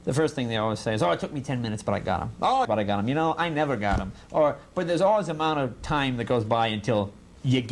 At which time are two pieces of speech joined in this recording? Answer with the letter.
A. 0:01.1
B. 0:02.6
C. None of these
B